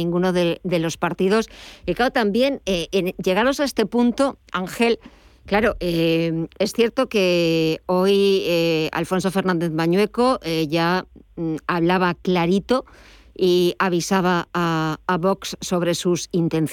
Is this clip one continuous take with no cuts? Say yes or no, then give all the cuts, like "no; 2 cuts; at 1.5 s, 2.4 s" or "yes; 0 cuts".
yes; 0 cuts